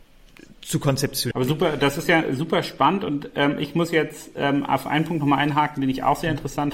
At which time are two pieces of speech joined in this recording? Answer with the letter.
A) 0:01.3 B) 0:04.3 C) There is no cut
A